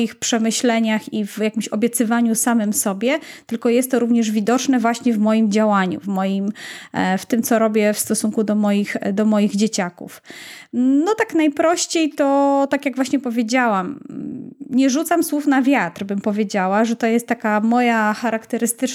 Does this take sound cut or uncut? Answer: cut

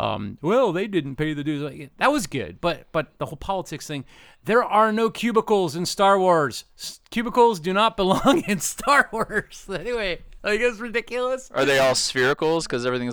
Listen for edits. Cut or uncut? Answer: uncut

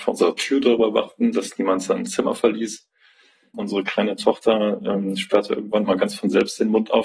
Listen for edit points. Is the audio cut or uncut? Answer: cut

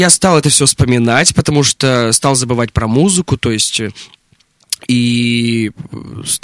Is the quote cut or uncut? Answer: uncut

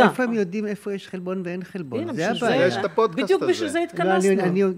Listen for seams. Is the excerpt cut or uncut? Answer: uncut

